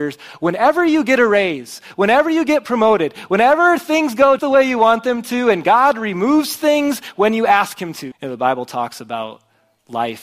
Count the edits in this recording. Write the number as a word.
two